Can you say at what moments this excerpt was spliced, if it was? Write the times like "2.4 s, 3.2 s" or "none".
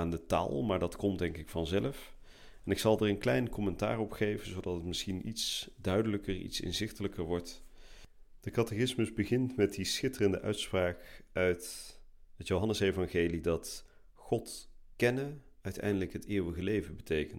none

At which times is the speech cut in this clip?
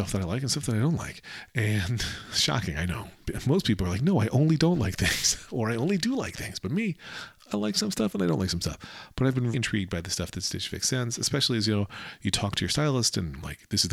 9.5 s

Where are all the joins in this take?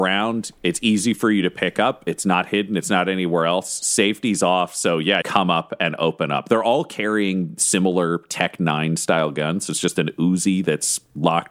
5.2 s

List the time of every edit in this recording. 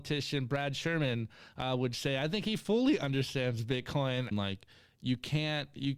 4.3 s

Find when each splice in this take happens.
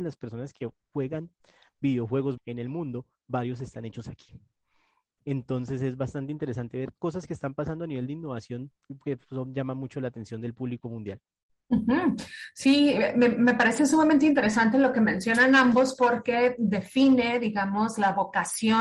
2.4 s

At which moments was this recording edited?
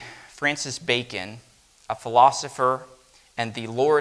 none

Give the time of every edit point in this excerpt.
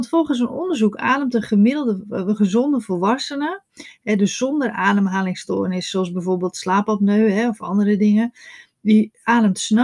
none

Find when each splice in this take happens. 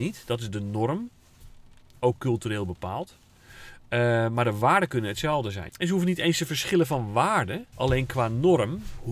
5.7 s, 7.7 s

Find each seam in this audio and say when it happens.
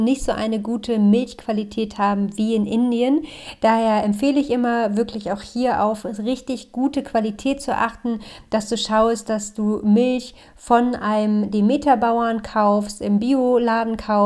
none

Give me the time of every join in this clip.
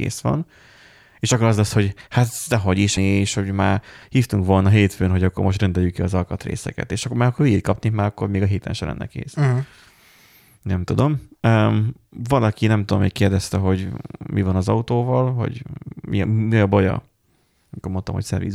3.0 s

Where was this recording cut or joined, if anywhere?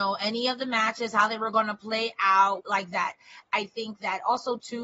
2.6 s

